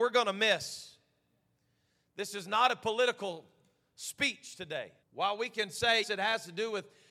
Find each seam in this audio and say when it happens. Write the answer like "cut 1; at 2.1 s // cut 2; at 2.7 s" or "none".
cut 1; at 5.0 s // cut 2; at 6.0 s